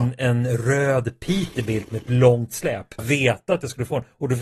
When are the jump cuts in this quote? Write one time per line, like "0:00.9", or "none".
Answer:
0:03.0